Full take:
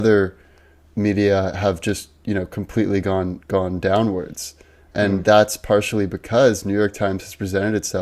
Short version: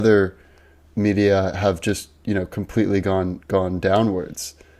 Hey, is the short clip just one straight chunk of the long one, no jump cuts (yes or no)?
yes